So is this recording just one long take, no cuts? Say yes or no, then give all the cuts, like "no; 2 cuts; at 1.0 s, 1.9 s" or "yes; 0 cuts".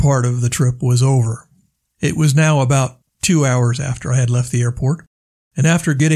yes; 0 cuts